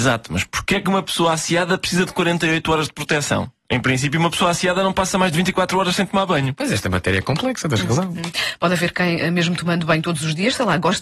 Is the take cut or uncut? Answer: uncut